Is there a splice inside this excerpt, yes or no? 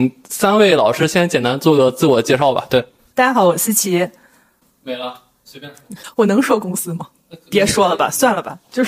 no